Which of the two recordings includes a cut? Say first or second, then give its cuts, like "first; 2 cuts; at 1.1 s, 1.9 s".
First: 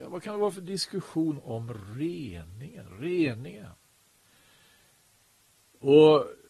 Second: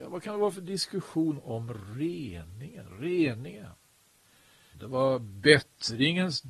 second; 1 cut; at 4.7 s